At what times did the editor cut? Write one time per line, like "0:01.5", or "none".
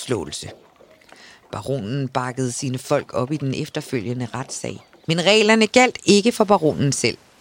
0:05.0